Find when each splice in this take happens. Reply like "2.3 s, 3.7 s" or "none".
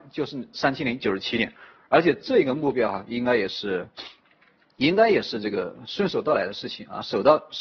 none